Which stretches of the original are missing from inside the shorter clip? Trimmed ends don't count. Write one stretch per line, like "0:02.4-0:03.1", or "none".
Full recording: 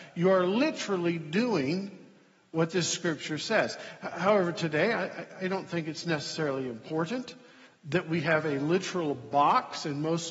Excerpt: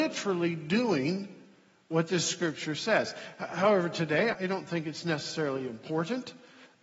0:05.0-0:05.3